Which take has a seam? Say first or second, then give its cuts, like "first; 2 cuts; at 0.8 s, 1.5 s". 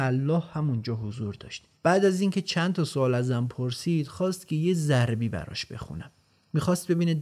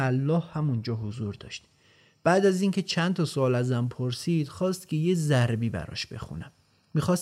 first; 1 cut; at 1.8 s